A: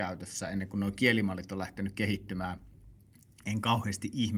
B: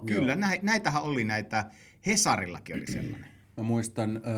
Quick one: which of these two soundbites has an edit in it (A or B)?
B